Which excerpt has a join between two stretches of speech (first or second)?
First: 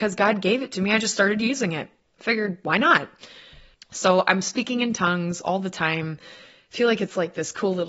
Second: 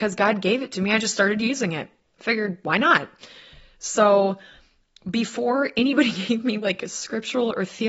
first